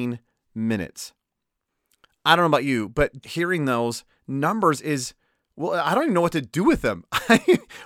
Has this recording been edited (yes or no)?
yes